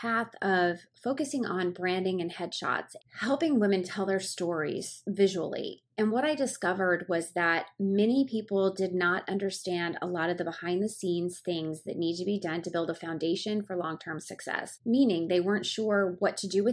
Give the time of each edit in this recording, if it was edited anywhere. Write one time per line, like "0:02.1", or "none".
none